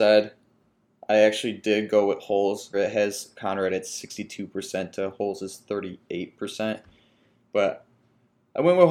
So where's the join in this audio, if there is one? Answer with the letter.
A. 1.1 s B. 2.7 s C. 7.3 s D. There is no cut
B